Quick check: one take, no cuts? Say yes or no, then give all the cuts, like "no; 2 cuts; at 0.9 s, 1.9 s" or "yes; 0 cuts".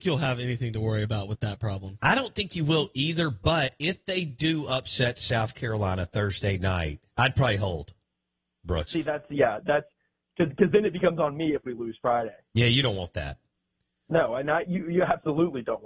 no; 2 cuts; at 7.1 s, 10.5 s